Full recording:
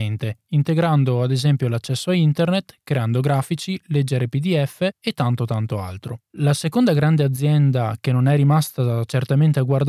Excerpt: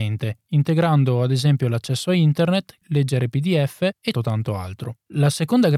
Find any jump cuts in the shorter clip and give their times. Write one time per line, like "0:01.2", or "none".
0:02.8
0:04.1